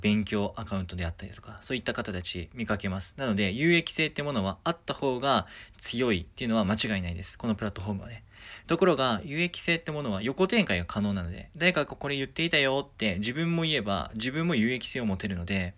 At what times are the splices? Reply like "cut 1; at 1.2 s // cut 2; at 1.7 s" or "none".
none